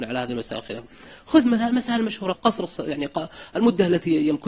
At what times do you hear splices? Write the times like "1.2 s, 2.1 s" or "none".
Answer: 2.3 s